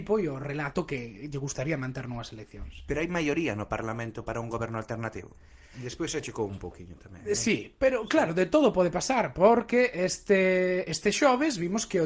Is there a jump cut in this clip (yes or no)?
yes